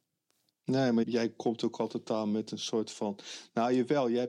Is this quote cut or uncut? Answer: cut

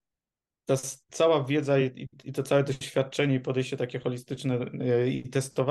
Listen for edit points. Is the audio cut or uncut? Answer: uncut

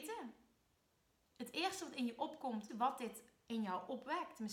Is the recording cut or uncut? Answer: cut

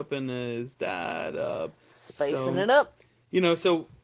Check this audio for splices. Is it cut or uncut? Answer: uncut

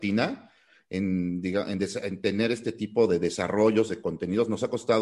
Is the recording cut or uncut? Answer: uncut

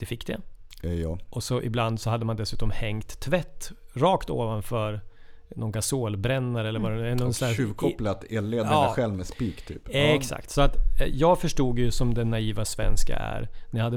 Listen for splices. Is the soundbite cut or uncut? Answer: uncut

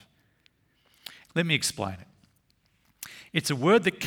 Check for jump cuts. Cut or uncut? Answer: cut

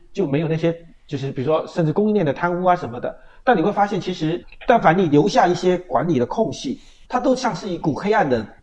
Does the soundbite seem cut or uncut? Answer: uncut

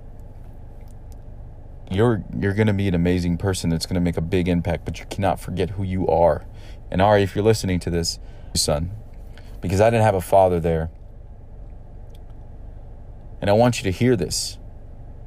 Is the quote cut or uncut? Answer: cut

